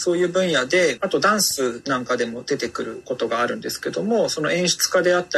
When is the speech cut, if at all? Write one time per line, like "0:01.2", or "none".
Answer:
0:01.0